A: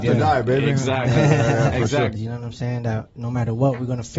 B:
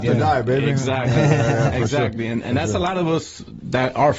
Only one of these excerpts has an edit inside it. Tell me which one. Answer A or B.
A